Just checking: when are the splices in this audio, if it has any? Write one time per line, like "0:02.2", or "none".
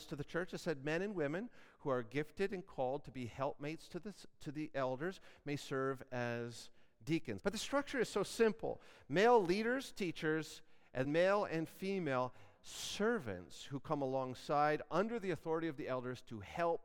0:07.4
0:11.0